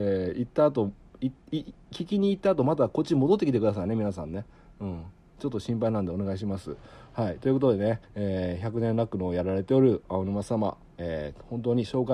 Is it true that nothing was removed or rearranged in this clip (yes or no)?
no